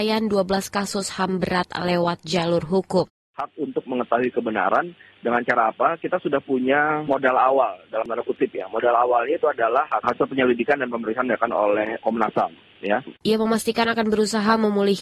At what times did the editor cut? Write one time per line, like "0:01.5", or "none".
0:12.0
0:13.2